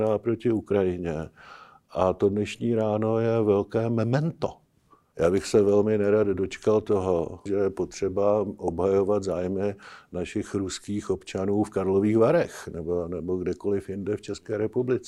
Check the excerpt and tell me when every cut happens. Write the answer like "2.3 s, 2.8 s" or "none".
5.1 s, 7.5 s